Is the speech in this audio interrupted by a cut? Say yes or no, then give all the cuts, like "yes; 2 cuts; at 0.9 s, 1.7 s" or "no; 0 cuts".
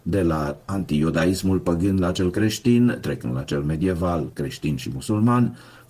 no; 0 cuts